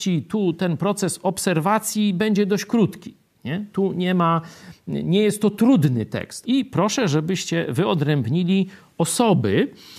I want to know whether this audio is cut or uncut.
cut